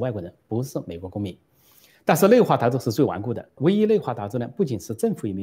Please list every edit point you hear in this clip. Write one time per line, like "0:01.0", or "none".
0:03.6

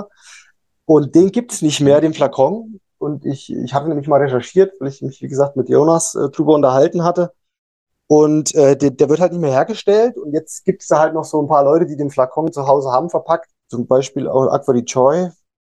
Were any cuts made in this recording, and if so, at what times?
0:13.6

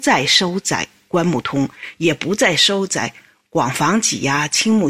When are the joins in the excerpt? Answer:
none

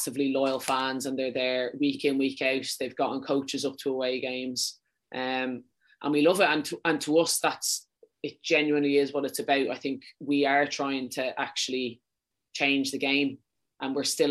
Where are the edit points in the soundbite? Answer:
none

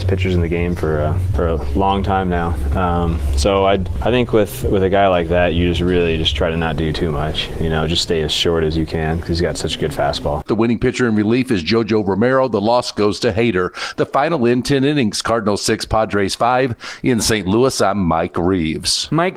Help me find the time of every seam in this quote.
0:10.5

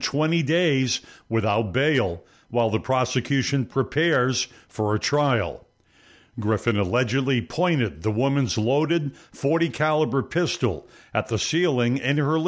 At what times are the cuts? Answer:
none

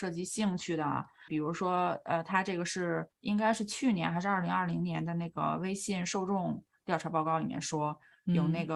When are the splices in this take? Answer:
0:01.3
0:03.1

